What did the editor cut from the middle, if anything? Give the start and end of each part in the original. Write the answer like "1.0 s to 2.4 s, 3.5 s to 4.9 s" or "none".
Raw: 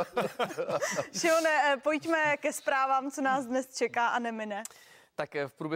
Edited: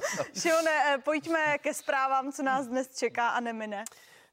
none